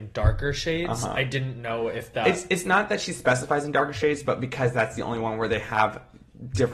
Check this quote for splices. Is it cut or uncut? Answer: uncut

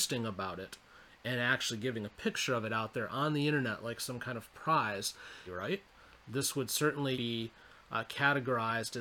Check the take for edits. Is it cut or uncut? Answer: cut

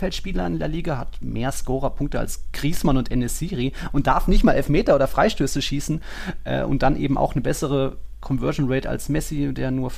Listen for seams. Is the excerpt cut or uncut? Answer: uncut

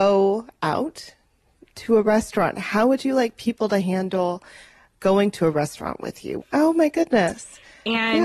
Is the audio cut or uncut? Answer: cut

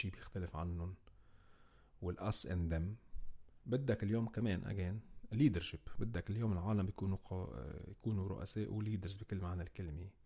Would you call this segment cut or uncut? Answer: cut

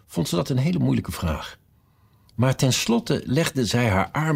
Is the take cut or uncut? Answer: uncut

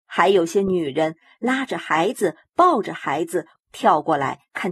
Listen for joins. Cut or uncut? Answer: cut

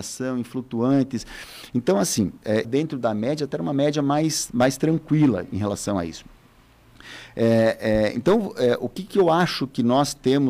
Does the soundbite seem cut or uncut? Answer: cut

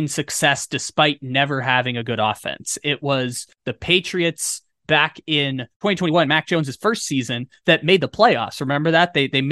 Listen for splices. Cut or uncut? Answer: uncut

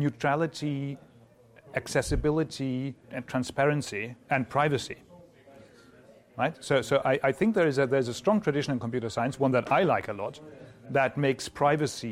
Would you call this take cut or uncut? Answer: cut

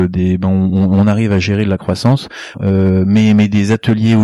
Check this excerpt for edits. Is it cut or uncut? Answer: cut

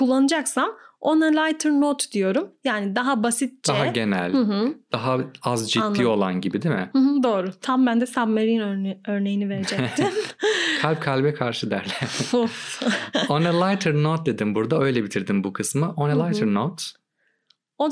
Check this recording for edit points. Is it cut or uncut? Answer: cut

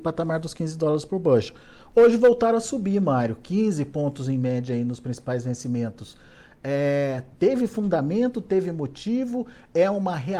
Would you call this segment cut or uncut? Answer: uncut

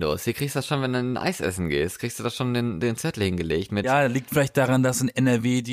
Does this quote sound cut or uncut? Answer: uncut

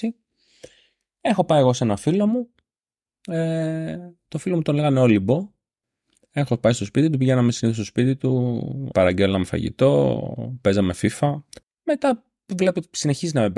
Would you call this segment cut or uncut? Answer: cut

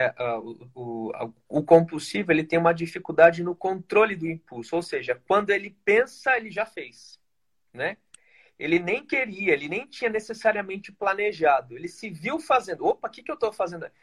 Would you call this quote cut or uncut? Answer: uncut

